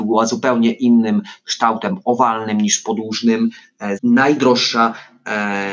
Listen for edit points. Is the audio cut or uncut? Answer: cut